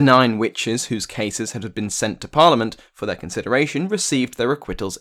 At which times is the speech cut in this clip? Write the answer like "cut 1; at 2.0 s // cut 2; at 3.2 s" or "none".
none